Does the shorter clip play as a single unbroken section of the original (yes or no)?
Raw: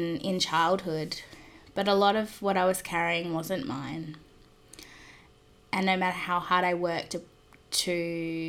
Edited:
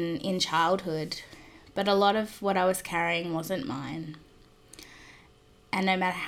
yes